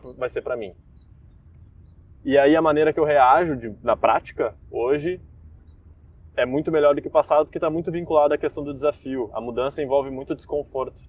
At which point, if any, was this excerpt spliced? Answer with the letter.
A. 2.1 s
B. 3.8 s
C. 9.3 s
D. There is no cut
D